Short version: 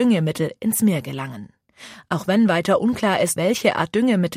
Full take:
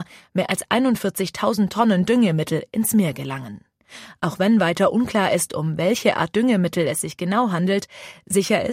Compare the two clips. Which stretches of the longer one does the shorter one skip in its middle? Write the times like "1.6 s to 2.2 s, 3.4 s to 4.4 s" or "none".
5.5 s to 5.8 s